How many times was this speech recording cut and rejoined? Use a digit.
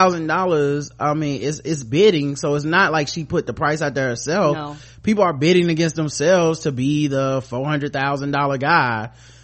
0